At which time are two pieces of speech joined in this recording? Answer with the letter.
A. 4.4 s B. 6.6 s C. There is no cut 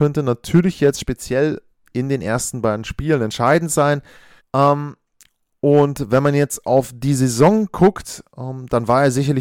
A